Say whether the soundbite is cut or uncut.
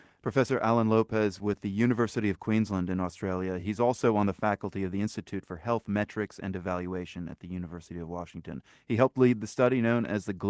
uncut